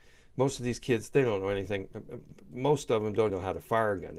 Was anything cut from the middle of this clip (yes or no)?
yes